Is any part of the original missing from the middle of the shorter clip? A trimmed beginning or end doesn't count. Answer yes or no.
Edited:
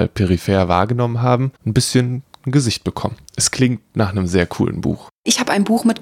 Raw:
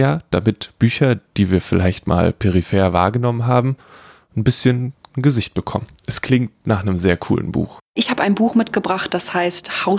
yes